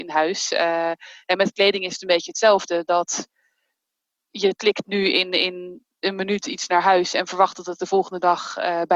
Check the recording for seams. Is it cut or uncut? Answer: uncut